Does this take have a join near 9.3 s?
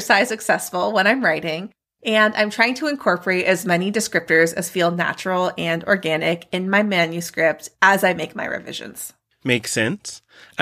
no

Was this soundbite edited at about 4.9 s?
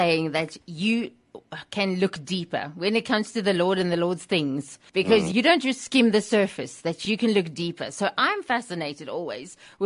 yes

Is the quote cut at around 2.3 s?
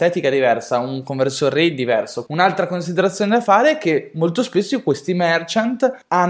yes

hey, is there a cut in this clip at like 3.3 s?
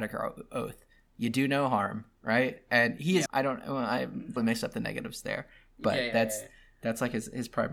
yes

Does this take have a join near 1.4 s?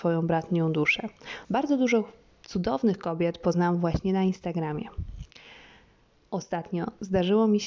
yes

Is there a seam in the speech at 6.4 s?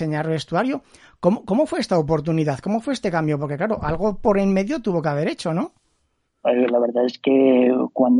yes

